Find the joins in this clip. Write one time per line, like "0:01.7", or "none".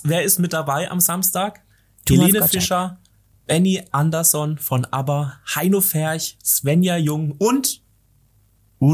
none